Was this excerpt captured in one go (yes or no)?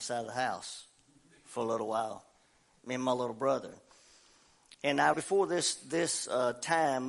no